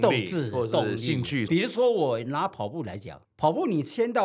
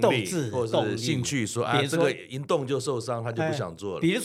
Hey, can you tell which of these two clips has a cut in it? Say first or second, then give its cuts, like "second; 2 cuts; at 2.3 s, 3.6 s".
first; 2 cuts; at 1.5 s, 3.2 s